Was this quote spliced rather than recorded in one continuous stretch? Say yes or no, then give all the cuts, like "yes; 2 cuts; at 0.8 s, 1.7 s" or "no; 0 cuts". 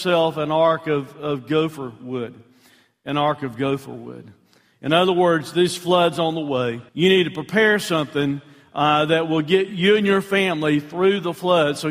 yes; 1 cut; at 6.9 s